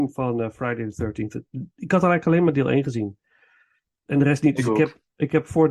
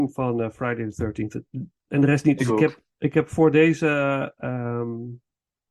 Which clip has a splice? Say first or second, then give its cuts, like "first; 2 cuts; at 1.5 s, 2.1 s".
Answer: second; 1 cut; at 1.7 s